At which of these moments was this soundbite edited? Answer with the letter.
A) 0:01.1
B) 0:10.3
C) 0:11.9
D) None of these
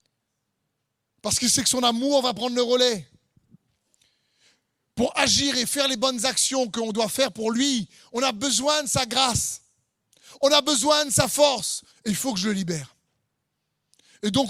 C